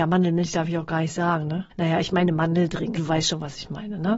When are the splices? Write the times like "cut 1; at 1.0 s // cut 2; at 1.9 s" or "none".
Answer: cut 1; at 1.7 s // cut 2; at 3.0 s